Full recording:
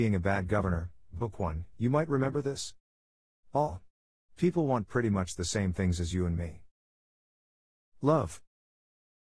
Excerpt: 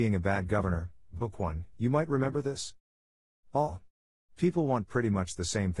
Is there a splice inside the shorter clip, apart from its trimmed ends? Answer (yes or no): no